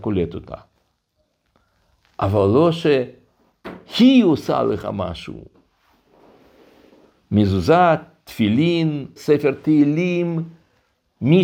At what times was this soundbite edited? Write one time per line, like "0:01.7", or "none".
0:09.2

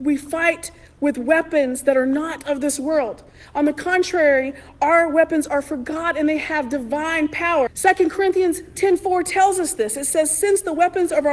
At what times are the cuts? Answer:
0:07.7

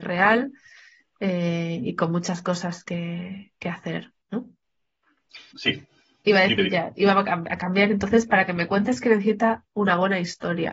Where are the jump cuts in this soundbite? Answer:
0:05.5

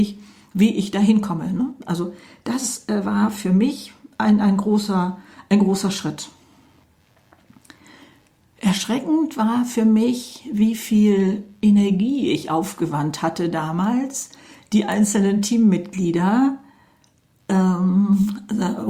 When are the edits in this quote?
none

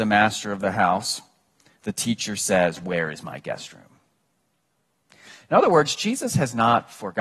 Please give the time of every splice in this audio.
none

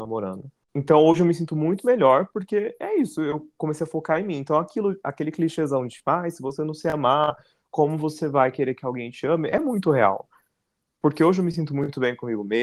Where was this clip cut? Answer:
none

